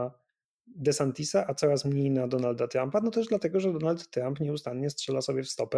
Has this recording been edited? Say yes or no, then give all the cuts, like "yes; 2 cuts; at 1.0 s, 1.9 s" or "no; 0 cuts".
no; 0 cuts